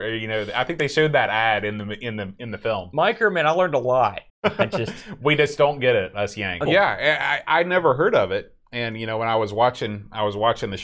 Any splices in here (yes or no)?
yes